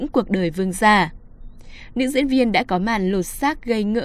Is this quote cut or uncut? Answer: cut